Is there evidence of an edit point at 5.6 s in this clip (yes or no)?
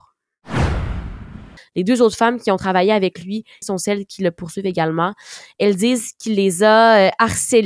no